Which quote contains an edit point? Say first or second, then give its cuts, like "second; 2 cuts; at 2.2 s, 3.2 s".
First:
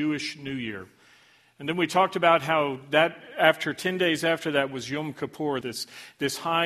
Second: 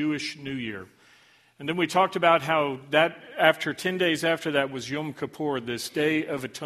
first; 1 cut; at 5.6 s